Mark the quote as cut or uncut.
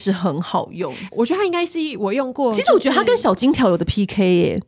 uncut